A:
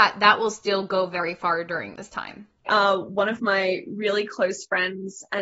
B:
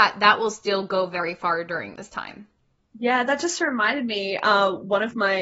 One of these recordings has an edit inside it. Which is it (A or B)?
A